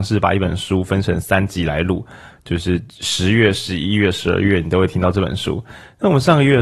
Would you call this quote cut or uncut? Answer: uncut